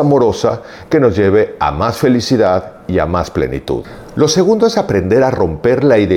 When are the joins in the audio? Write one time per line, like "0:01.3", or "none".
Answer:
none